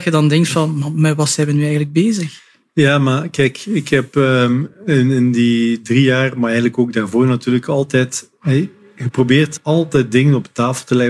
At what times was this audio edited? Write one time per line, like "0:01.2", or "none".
none

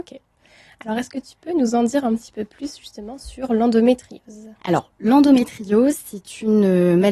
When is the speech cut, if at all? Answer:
0:04.6

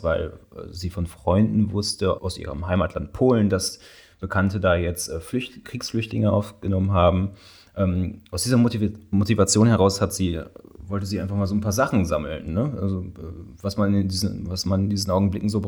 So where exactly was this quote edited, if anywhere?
0:02.2

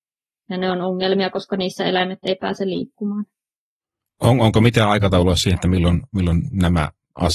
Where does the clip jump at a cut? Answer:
none

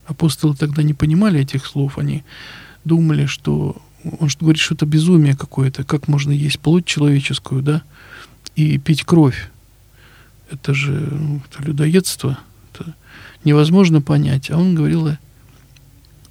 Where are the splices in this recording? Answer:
none

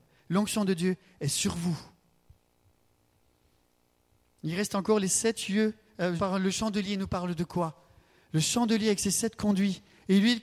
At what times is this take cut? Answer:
0:06.2

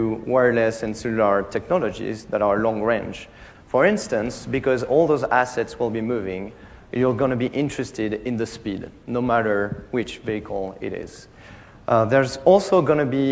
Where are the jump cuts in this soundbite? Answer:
0:03.5

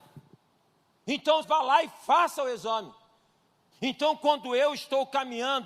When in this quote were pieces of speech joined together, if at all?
0:01.4
0:03.7

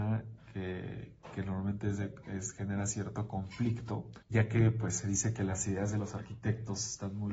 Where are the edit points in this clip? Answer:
0:04.2

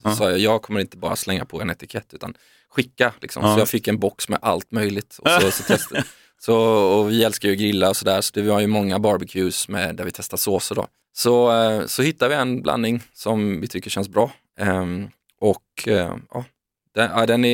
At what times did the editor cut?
0:11.0

